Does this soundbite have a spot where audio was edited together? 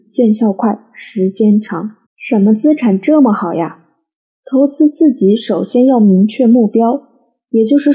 yes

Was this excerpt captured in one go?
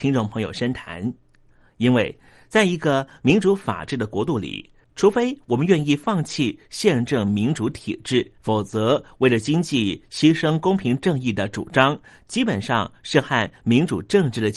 no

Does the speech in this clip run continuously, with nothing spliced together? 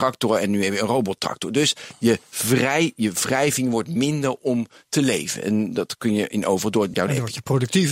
no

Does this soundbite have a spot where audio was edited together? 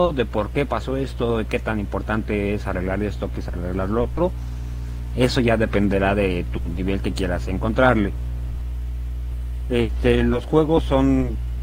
no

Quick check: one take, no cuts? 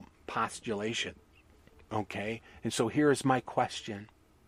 yes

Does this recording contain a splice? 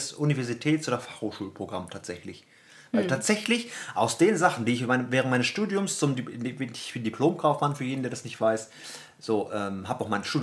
no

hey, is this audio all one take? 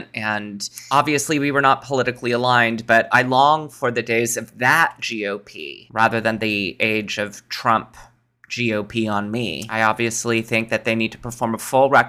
no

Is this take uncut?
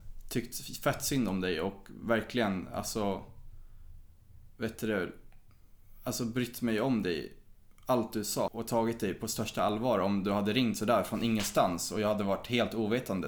no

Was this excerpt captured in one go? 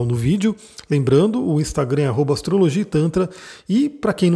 yes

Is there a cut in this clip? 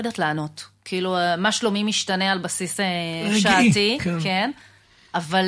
no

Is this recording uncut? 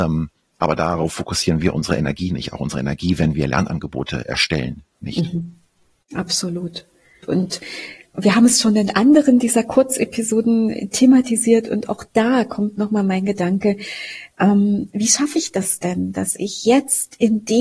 yes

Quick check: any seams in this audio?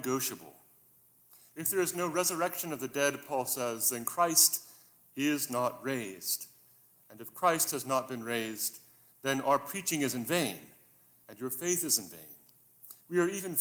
no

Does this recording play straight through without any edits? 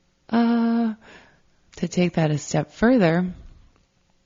no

